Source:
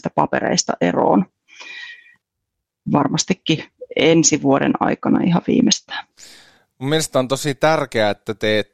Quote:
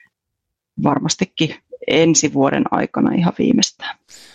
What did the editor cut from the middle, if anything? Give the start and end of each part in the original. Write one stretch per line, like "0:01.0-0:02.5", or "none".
none